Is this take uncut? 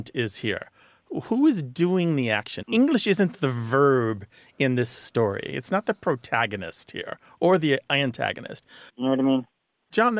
no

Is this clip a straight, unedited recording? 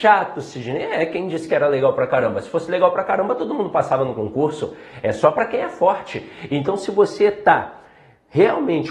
yes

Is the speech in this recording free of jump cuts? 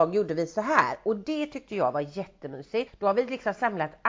no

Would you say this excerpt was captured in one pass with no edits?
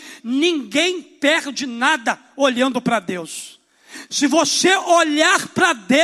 no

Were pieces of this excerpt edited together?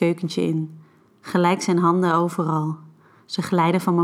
yes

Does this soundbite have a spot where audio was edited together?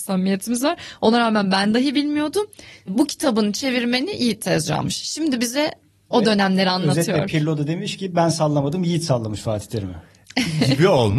no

